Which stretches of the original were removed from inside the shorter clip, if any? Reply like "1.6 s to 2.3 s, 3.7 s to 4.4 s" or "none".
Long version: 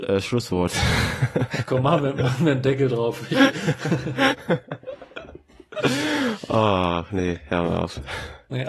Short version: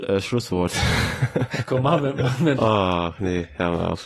2.5 s to 6.5 s

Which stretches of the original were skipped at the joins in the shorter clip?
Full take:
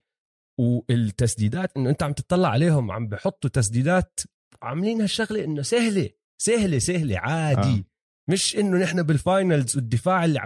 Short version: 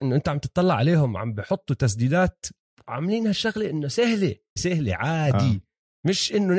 6.3 s to 6.8 s

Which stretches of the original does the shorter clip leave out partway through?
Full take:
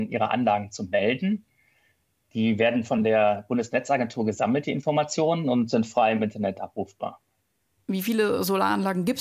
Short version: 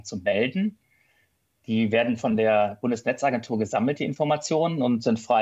none

